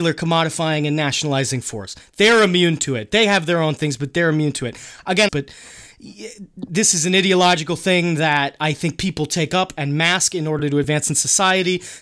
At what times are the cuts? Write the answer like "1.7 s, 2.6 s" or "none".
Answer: 5.3 s